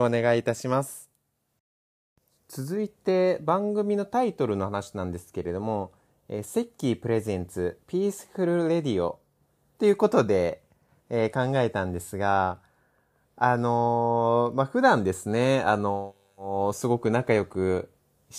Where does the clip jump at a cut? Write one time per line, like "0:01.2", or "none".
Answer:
none

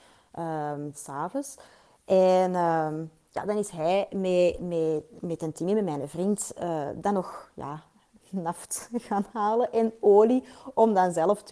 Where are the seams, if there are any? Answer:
none

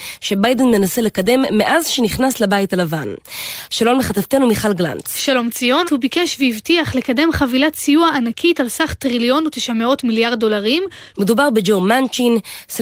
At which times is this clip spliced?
0:05.8
0:11.1

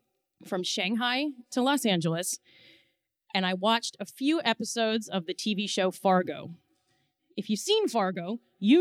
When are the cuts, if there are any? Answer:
none

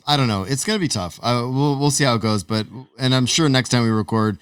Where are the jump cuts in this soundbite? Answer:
none

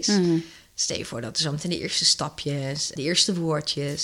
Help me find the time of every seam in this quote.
0:03.0

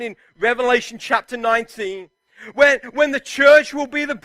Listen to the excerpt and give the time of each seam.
none

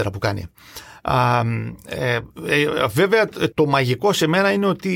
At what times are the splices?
0:03.5

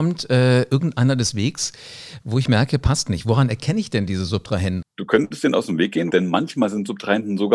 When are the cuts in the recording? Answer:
0:04.8
0:06.1

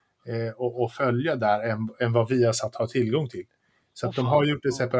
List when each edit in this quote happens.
none

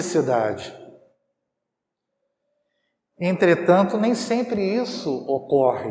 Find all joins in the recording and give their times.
none

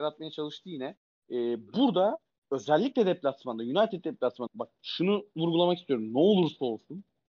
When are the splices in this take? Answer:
0:04.5

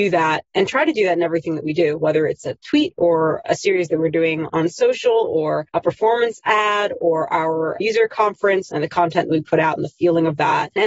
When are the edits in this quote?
none

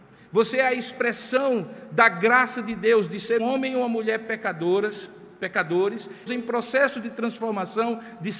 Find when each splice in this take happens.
0:03.4
0:06.3

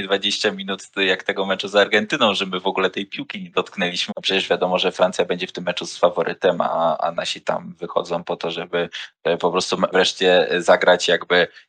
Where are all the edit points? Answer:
0:04.1
0:09.9

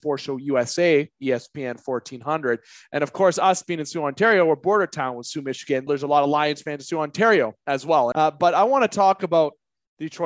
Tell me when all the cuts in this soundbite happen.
0:05.9
0:08.1

